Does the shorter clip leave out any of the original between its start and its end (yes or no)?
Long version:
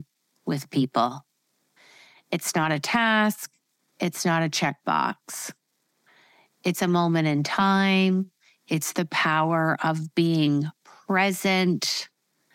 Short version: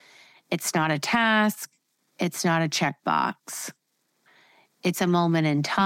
no